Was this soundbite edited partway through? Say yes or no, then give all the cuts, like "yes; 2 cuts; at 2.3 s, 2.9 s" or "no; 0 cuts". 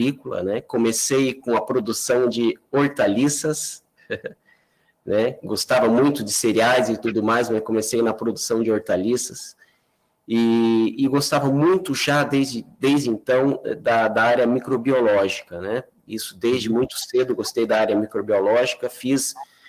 no; 0 cuts